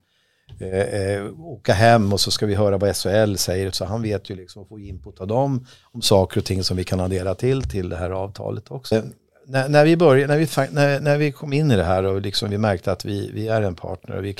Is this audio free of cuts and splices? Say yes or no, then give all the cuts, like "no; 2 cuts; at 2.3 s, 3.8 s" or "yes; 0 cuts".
no; 2 cuts; at 3.7 s, 8.9 s